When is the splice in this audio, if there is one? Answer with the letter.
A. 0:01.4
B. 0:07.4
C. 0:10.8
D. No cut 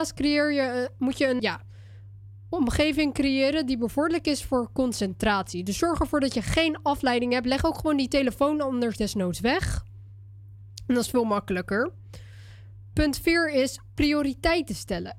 A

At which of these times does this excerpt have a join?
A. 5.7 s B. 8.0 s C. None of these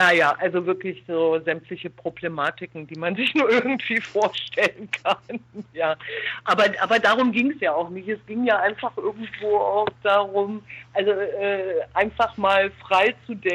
C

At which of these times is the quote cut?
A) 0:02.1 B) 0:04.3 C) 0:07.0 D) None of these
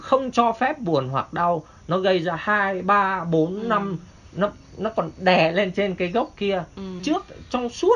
C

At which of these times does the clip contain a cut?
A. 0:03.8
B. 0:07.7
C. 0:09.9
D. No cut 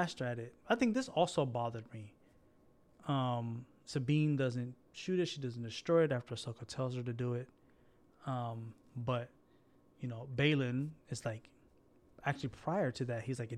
D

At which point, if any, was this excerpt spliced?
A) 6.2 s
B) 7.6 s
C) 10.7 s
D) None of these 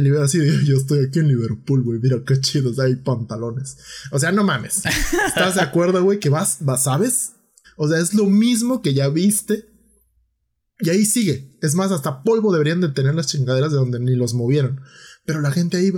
B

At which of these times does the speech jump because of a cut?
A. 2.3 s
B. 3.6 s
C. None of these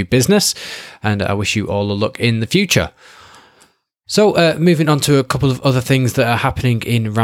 C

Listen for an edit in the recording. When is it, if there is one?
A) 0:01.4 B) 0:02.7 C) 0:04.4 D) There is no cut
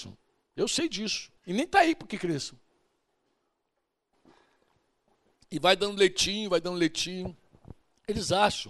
A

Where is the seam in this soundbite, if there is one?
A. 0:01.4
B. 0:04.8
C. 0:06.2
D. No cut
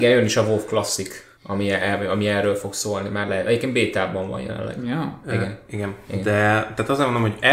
A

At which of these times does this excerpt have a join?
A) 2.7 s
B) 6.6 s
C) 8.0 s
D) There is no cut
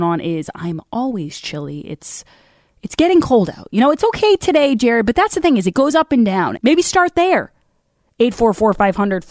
B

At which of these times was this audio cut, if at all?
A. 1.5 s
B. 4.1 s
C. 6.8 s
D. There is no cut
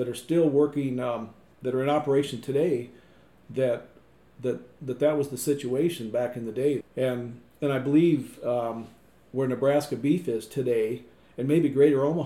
C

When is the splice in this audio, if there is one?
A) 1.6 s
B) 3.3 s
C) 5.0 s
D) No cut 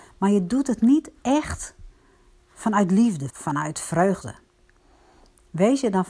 B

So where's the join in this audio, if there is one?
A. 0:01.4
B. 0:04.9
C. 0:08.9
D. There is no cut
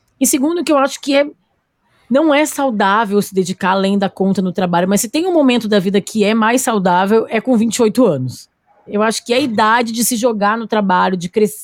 C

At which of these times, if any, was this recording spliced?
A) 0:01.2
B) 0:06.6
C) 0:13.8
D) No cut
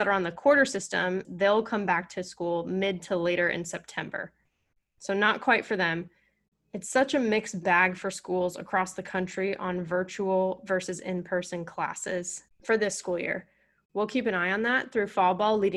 A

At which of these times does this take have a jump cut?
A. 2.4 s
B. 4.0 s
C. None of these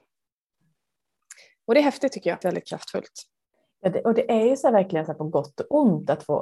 A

